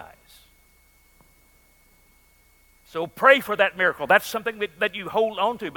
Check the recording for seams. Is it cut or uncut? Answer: uncut